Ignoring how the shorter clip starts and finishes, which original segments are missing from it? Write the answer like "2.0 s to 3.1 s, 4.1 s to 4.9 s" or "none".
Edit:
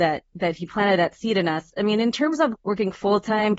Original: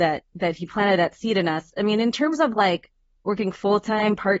2.5 s to 3.1 s